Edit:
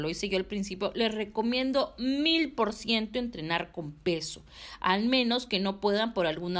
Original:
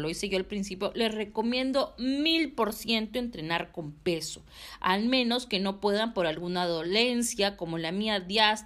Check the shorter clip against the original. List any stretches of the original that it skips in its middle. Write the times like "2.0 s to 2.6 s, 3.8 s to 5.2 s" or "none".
none